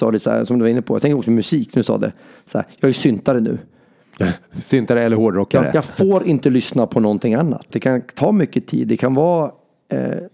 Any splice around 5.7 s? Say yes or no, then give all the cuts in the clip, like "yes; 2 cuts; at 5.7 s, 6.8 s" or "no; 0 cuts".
no; 1 cut; at 7.7 s